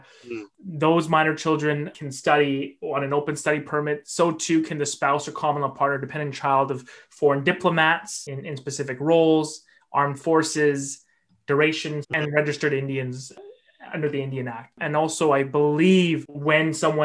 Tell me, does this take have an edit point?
yes; 1 cut; at 12.0 s

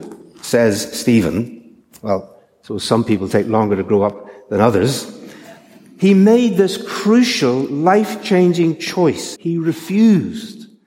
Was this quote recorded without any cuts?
no; 1 cut; at 9.4 s

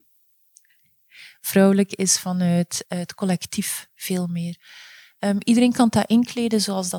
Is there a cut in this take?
no; 0 cuts

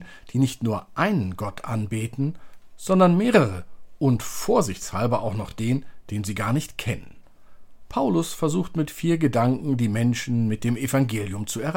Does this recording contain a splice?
no; 0 cuts

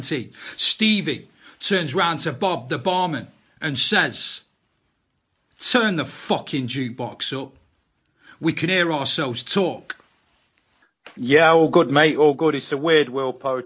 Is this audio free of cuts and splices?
yes; 0 cuts

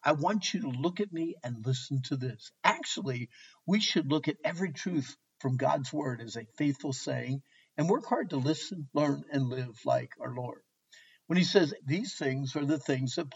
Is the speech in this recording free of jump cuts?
no; 1 cut; at 11.8 s

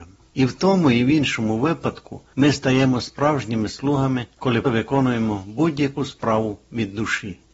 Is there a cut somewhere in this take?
yes; 1 cut; at 4.6 s

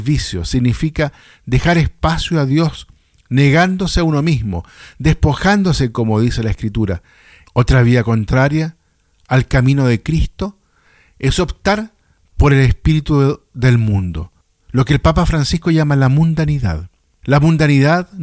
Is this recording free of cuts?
no; 1 cut; at 7.5 s

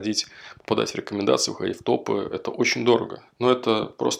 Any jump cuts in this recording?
yes; 1 cut; at 3.3 s

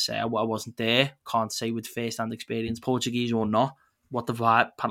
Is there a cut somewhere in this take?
yes; 1 cut; at 2.8 s

